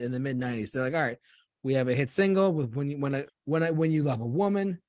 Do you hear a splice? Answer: yes; 1 cut; at 3.3 s

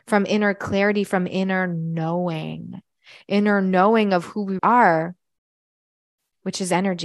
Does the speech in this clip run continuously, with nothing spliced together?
no; 1 cut; at 4.6 s

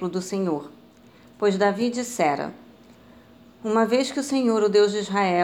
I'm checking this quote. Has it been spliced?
no; 0 cuts

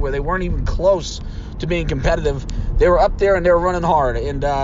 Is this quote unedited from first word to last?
yes; 0 cuts

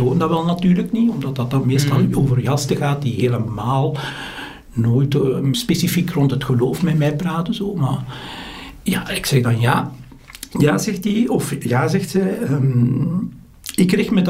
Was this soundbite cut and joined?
no; 0 cuts

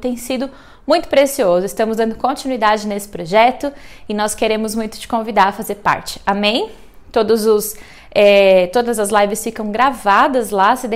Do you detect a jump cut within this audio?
no; 0 cuts

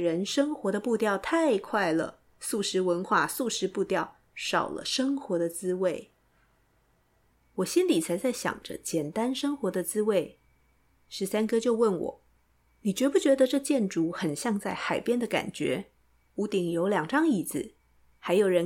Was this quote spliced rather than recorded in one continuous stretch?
yes; 1 cut; at 16.3 s

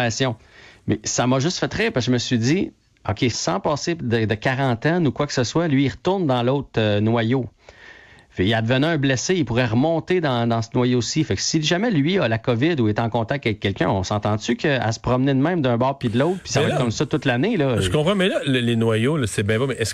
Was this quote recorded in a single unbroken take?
no; 1 cut; at 3.3 s

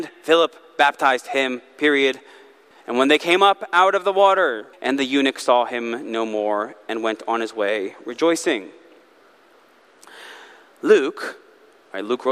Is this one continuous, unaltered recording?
no; 2 cuts; at 2.7 s, 4.7 s

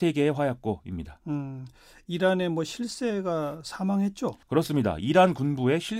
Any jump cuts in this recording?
yes; 1 cut; at 4.4 s

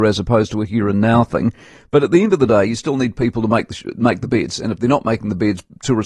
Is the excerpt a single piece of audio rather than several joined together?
yes; 0 cuts

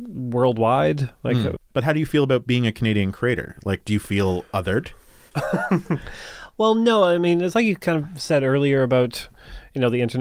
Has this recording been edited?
yes; 1 cut; at 1.6 s

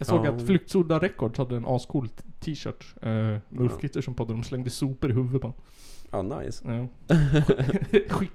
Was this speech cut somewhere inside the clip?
no; 0 cuts

